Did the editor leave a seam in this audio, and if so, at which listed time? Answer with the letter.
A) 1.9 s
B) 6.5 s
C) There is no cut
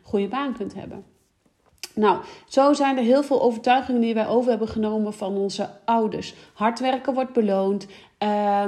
C